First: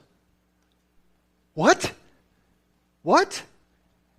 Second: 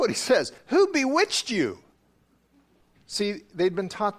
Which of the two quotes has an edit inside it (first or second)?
second